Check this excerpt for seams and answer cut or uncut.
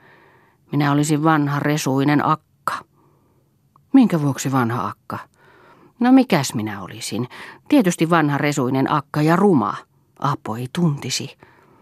uncut